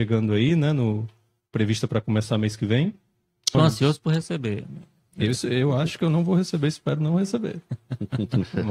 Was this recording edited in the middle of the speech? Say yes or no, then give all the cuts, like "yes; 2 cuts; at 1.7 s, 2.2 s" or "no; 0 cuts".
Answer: yes; 1 cut; at 3.5 s